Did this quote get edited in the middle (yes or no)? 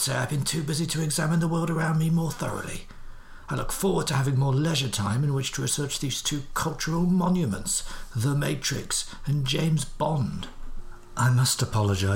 no